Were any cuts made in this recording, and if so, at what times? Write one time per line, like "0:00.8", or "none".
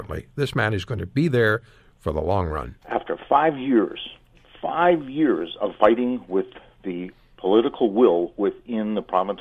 0:02.8